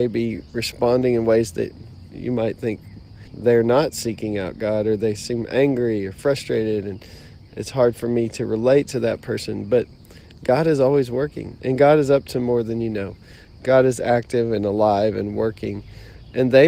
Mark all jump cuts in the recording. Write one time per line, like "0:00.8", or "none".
0:03.3
0:13.4